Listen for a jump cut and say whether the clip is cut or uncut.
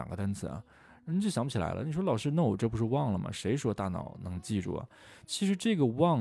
uncut